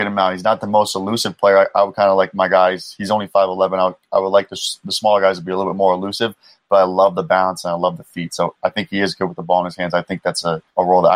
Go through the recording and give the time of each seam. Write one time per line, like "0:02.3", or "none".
none